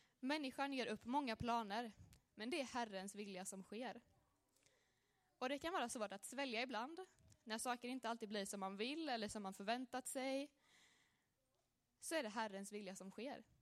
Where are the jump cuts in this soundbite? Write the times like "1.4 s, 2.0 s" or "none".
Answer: none